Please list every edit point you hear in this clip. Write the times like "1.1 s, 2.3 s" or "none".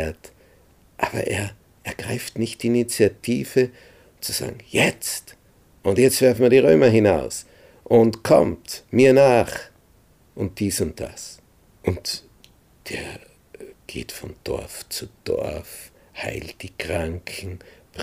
11.7 s